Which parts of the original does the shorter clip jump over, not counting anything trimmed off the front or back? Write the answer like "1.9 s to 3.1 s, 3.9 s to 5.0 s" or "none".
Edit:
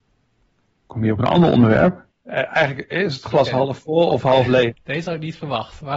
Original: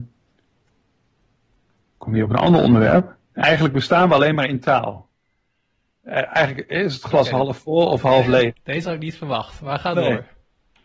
3.2 s to 5.9 s